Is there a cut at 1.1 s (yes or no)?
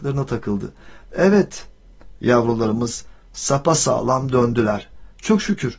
yes